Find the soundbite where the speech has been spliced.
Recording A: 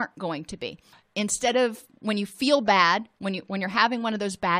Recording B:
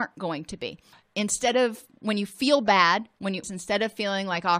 B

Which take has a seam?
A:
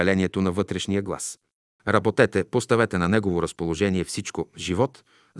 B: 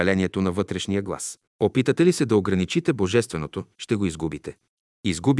B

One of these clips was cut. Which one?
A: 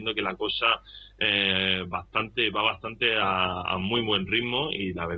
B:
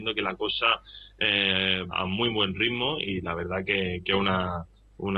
B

